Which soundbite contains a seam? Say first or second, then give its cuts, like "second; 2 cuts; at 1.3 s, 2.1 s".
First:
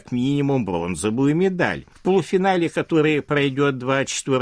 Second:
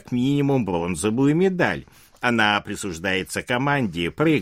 first; 1 cut; at 1.9 s